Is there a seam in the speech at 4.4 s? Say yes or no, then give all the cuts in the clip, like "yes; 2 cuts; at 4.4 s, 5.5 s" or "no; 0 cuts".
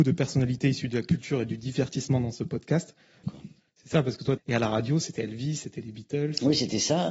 yes; 2 cuts; at 3.2 s, 4.4 s